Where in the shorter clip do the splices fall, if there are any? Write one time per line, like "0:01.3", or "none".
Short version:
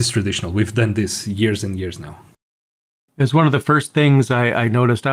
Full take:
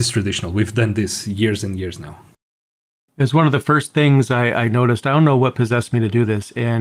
none